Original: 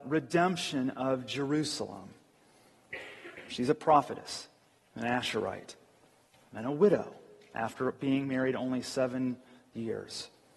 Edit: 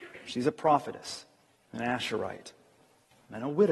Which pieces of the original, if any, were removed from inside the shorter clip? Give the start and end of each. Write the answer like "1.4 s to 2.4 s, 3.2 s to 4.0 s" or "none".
none